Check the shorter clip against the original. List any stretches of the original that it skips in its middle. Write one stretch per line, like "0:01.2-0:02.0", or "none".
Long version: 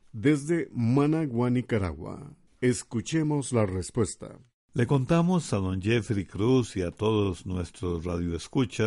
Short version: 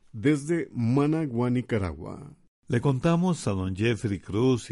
0:02.5-0:04.5